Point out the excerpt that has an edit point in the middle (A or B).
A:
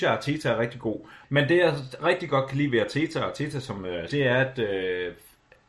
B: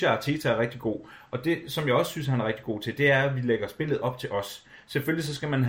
A